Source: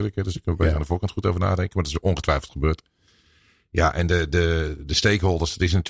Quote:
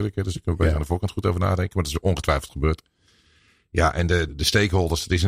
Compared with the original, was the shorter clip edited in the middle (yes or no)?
yes